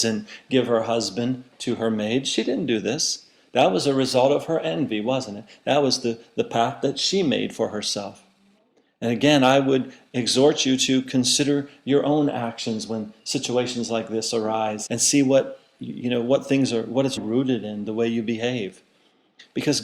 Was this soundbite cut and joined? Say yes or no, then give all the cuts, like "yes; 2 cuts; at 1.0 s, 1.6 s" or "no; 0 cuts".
yes; 2 cuts; at 14.9 s, 17.2 s